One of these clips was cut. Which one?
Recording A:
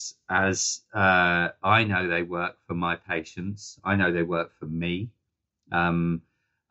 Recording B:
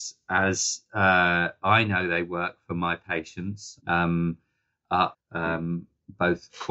B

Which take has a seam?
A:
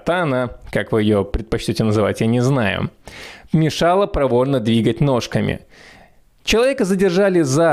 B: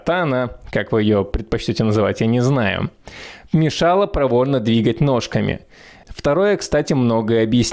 B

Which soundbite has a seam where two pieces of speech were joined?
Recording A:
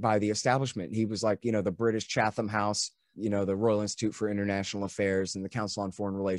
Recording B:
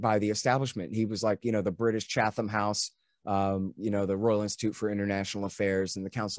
A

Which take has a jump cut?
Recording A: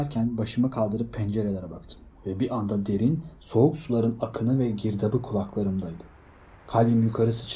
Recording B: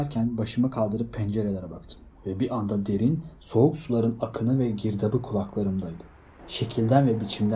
B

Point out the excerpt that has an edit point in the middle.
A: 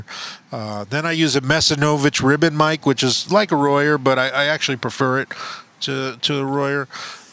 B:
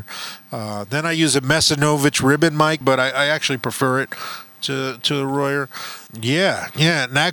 B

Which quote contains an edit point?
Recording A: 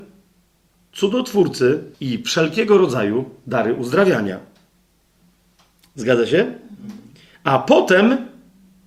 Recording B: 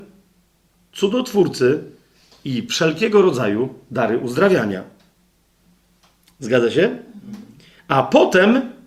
A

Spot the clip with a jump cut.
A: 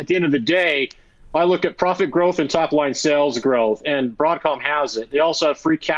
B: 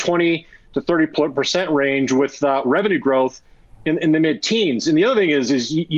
B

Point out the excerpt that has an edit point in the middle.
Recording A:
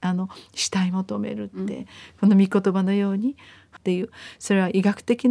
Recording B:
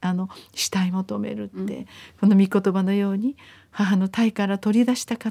A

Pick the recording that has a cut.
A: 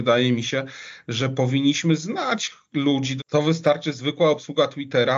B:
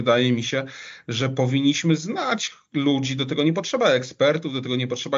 A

